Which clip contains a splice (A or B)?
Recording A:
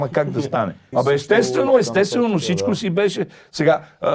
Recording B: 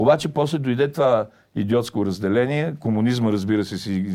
A